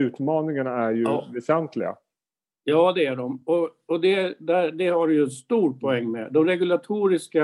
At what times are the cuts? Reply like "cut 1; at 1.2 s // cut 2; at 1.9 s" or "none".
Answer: none